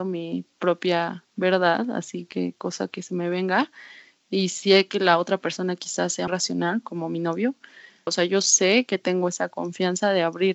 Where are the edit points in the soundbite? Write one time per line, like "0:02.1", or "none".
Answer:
0:06.3
0:08.1

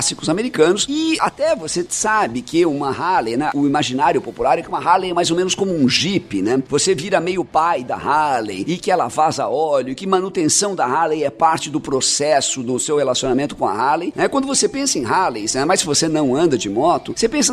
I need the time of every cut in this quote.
0:14.1

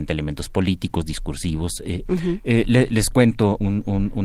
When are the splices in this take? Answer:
0:02.1

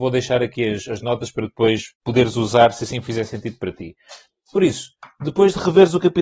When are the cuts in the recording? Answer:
none

